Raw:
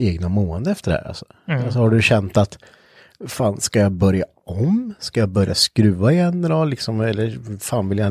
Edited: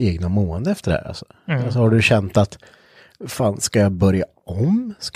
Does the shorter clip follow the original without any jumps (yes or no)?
yes